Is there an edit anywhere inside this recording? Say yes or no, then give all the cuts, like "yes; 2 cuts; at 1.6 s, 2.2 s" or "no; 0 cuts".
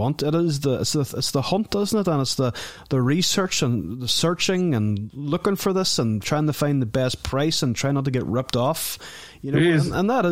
no; 0 cuts